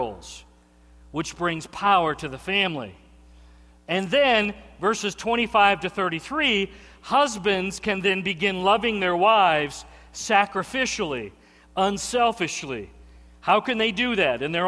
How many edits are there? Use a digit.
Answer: 0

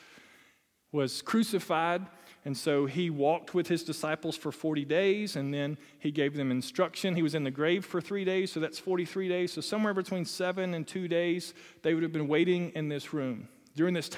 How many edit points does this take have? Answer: 0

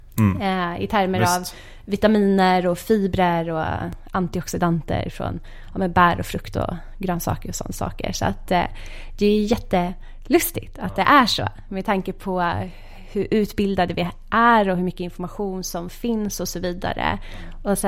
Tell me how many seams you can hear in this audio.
0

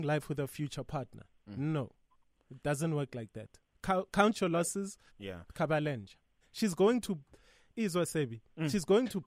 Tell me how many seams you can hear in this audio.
2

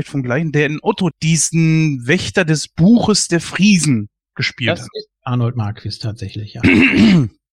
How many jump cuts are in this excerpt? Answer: 1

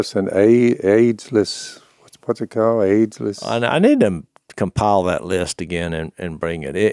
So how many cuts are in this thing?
0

